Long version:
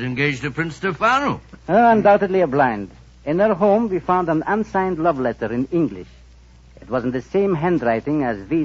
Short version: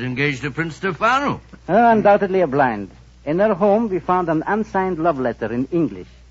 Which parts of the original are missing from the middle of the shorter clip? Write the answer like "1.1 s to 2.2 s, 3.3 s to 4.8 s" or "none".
none

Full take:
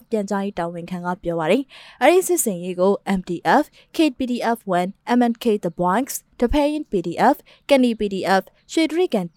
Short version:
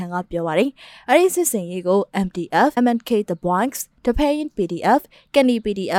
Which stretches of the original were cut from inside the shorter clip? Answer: 3.7 s to 5.1 s

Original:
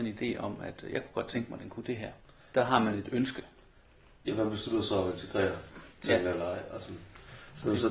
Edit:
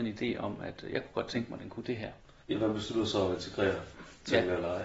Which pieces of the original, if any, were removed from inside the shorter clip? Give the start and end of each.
2.4 s to 4.2 s

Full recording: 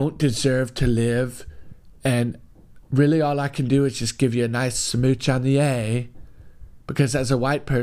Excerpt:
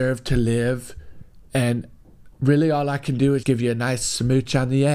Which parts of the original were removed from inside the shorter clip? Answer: 3.9 s to 4.2 s

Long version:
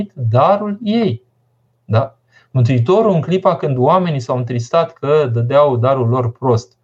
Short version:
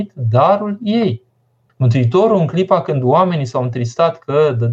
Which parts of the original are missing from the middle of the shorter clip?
1.7 s to 2.4 s

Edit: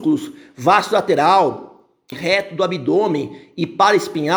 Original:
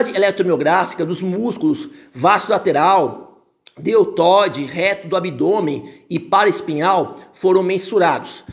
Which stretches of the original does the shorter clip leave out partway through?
3.7 s to 4.6 s

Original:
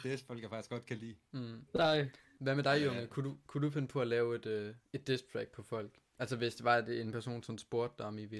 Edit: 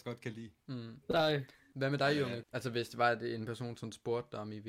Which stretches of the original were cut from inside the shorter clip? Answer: 3.1 s to 6.1 s

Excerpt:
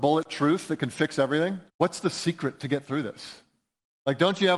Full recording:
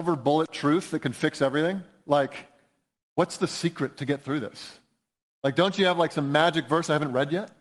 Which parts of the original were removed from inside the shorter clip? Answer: 1.9 s to 3.1 s

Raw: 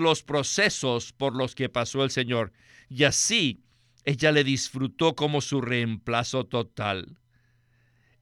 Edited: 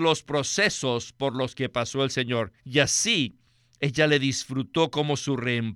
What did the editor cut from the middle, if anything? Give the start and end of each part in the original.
2.6 s to 2.8 s

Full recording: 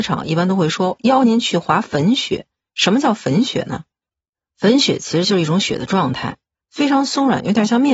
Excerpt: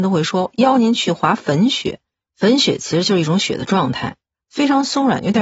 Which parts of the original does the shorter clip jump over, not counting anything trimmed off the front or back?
2.7 s to 4.5 s

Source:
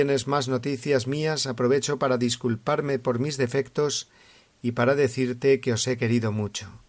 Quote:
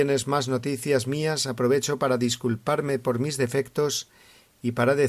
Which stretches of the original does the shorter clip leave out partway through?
none

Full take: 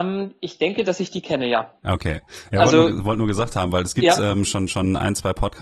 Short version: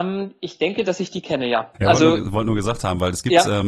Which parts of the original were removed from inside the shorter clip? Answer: 1.7 s to 2.5 s

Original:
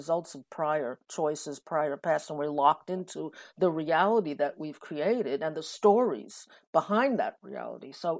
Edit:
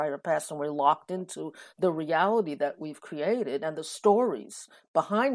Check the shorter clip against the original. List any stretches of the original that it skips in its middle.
none

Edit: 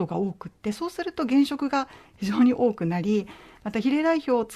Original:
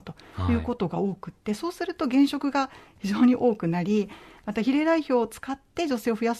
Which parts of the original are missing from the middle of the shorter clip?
none

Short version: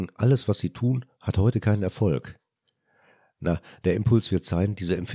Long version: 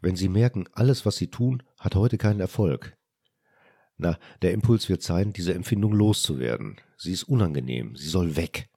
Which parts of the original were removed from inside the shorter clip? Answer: none

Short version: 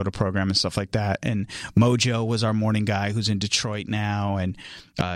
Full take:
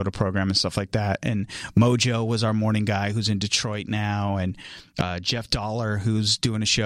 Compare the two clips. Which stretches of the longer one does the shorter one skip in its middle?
none

